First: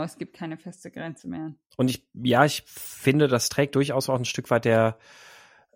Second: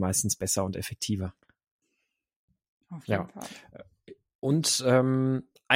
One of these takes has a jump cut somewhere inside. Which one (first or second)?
first